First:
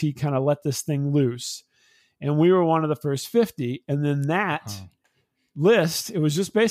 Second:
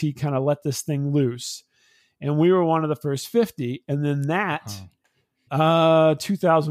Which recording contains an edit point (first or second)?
second